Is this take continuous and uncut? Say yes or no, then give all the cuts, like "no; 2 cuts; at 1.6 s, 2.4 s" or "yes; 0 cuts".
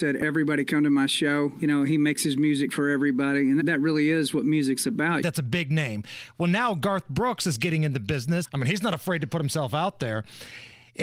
no; 3 cuts; at 3.6 s, 5.2 s, 8.4 s